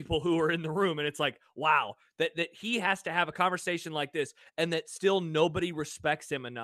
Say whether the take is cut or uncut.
uncut